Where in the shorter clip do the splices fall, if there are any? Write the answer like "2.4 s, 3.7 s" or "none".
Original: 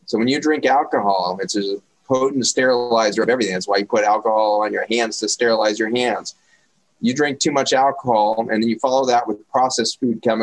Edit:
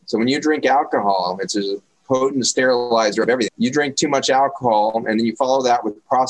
3.5 s

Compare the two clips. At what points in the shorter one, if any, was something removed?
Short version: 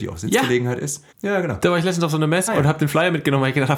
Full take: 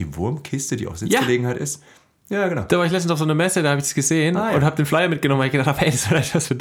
1.1 s, 2.5 s

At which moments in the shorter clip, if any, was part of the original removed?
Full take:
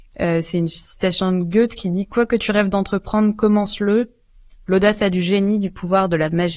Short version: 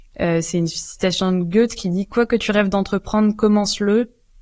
none

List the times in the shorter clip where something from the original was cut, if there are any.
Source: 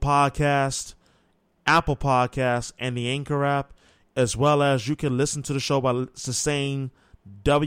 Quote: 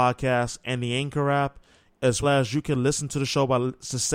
2.2 s

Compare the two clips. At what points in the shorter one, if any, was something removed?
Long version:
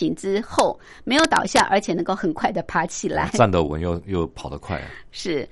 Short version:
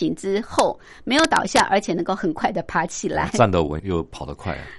3.8 s

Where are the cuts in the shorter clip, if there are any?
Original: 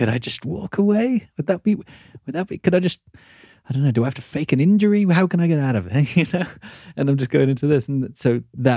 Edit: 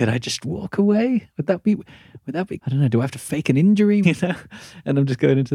2.6 s, 4.0 s

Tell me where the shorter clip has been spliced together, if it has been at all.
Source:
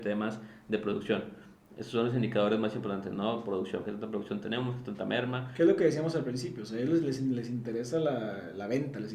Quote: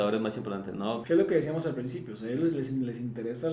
1.0 s

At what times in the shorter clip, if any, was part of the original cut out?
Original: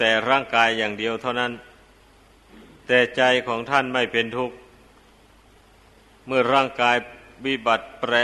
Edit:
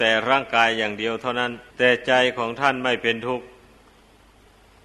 1.7 s

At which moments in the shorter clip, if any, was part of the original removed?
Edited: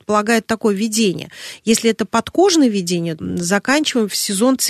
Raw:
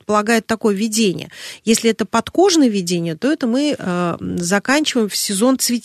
3.2 s

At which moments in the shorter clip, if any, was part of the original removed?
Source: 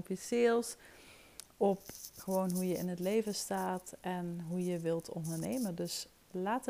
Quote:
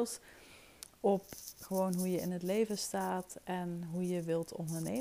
none

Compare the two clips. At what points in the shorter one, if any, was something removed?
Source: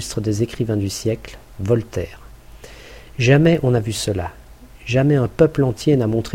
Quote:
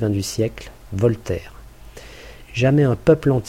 2.4 s

